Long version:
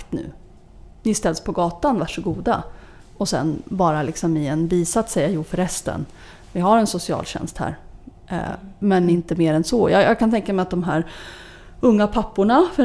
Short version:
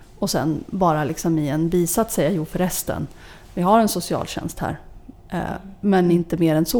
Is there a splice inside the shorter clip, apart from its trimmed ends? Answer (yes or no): no